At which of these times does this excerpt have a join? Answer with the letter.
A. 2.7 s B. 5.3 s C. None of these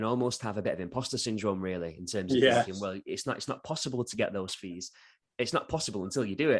C